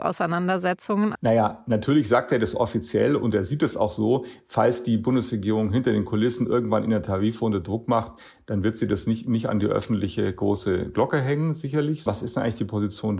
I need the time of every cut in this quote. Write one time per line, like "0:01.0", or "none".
0:01.1
0:12.1